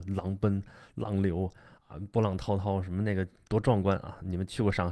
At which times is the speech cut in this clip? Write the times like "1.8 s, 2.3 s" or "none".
none